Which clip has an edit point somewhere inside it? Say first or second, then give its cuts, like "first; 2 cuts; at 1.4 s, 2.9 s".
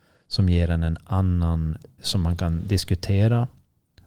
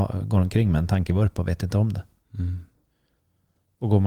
first; 1 cut; at 2.0 s